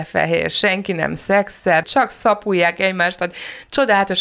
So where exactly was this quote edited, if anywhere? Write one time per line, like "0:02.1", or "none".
0:01.8